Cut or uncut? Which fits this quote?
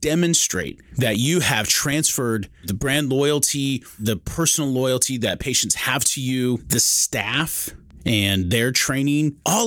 uncut